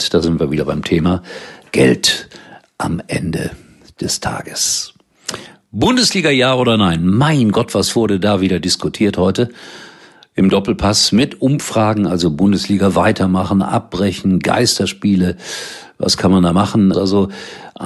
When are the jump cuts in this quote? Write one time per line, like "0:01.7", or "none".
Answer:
0:16.9